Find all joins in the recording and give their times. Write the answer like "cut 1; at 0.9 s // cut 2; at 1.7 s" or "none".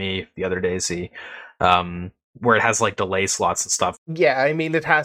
cut 1; at 4.0 s